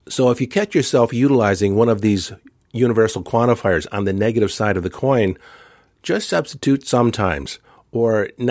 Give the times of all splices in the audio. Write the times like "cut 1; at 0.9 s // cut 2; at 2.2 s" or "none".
none